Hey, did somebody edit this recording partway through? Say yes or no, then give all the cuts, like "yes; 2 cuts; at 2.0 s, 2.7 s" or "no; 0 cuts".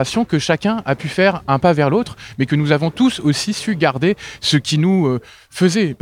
no; 0 cuts